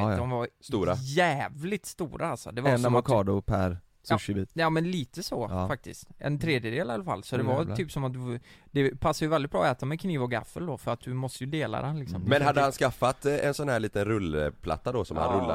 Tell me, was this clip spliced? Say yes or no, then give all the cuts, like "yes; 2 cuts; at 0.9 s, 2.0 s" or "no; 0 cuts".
no; 0 cuts